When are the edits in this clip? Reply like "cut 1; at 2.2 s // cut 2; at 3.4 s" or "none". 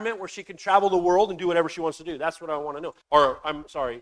cut 1; at 3.0 s